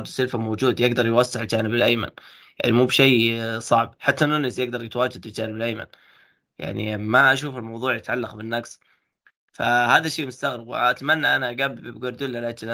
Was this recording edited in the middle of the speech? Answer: no; 0 cuts

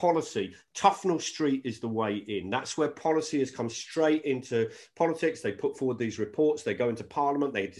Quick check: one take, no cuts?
yes; 0 cuts

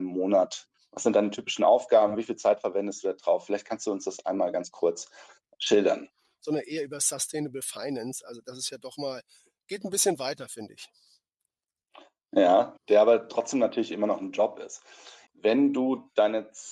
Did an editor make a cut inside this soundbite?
yes; 3 cuts; at 6.4 s, 12.8 s, 15.3 s

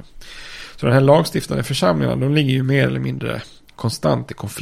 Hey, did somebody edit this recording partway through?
no; 0 cuts

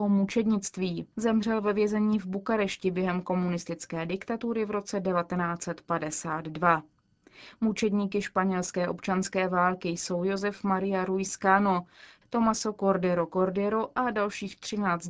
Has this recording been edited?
yes; 2 cuts; at 1.1 s, 12.2 s

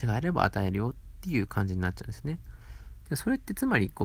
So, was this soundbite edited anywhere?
yes; 1 cut; at 3.0 s

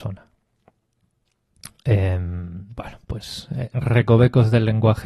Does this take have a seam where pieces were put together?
no; 0 cuts

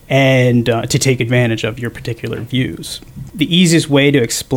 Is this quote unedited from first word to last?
no; 1 cut; at 3.3 s

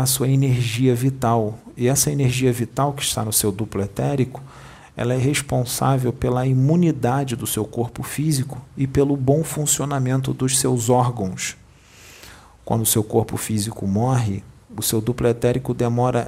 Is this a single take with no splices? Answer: yes; 0 cuts

